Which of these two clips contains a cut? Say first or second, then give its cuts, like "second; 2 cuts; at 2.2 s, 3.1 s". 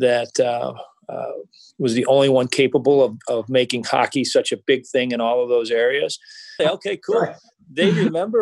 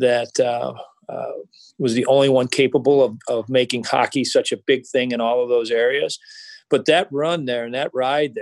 first; 1 cut; at 6.6 s